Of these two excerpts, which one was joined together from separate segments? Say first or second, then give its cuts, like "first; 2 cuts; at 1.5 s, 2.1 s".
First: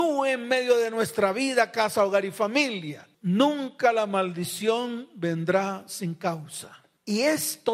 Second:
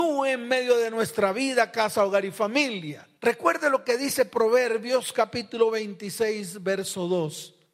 first; 1 cut; at 3.1 s